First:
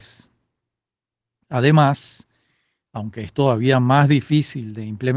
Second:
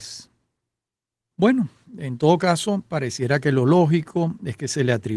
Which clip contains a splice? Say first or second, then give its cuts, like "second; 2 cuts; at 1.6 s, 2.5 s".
second; 1 cut; at 1.3 s